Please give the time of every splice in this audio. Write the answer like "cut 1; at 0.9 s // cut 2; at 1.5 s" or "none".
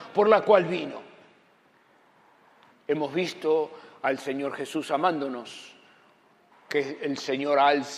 cut 1; at 2.7 s // cut 2; at 6.5 s